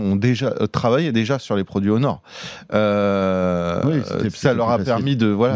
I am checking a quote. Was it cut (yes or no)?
no